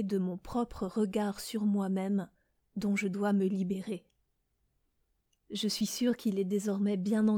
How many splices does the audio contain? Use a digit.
1